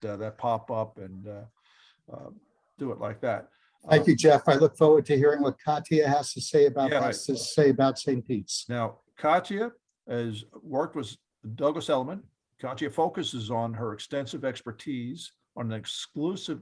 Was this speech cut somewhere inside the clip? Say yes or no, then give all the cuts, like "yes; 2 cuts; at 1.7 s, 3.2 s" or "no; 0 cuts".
yes; 1 cut; at 7.0 s